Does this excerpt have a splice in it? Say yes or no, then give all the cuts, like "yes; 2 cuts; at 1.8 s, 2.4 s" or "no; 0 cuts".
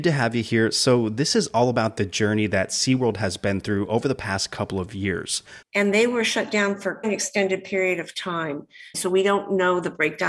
yes; 3 cuts; at 5.6 s, 7.0 s, 8.9 s